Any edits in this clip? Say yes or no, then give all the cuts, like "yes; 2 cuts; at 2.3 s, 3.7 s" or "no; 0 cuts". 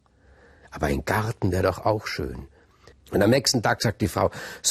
yes; 1 cut; at 2.9 s